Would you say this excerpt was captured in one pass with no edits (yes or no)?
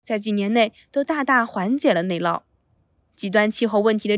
no